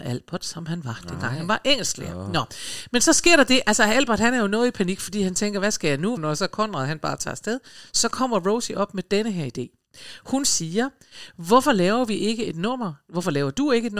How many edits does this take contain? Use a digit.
1